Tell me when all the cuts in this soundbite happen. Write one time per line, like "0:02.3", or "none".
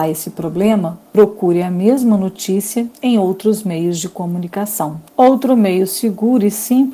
0:05.1